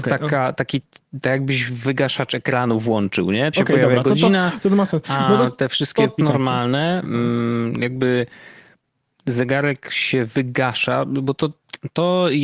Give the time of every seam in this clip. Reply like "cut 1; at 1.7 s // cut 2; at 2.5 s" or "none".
cut 1; at 3.5 s // cut 2; at 6.2 s